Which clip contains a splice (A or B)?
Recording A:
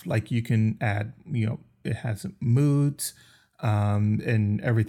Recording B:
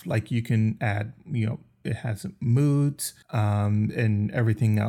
B